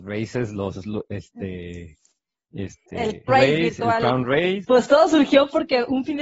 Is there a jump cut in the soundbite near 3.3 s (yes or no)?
yes